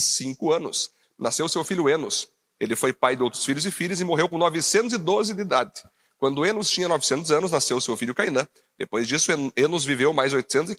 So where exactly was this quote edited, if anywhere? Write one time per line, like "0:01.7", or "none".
0:02.6